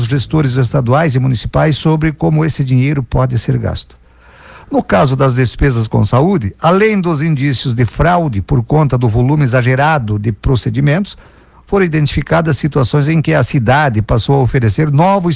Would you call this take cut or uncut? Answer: uncut